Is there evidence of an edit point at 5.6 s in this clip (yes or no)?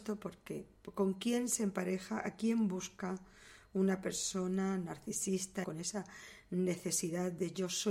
yes